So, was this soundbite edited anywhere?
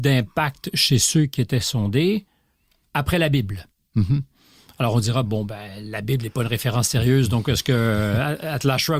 no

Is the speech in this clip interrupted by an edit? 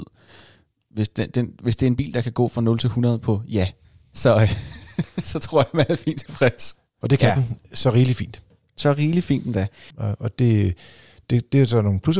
yes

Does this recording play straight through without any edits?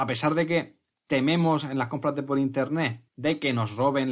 no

